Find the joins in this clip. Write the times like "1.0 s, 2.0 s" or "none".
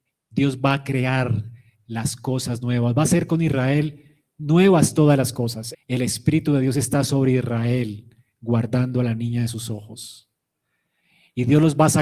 5.7 s